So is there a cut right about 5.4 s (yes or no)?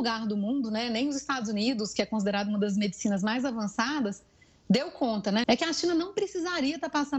yes